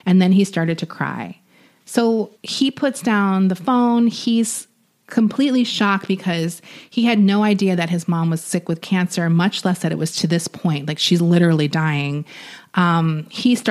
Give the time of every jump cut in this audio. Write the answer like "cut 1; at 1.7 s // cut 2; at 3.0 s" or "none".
cut 1; at 2.3 s